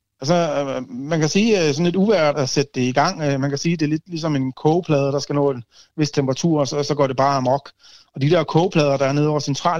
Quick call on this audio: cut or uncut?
cut